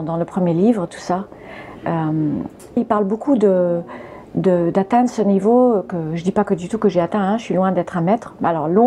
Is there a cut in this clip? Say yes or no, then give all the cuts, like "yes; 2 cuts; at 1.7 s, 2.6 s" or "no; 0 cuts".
yes; 1 cut; at 2.8 s